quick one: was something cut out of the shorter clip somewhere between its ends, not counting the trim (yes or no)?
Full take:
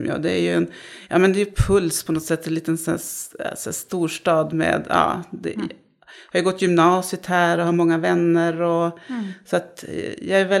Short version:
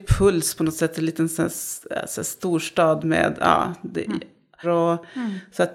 yes